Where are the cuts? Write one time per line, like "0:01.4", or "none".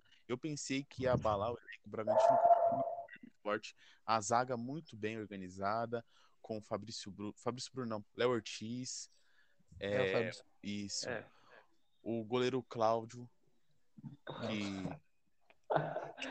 0:01.9
0:08.0
0:10.4